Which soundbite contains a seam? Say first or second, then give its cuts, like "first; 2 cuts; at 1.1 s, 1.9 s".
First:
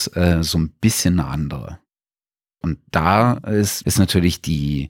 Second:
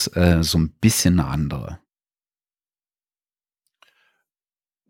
first; 2 cuts; at 2.6 s, 3.8 s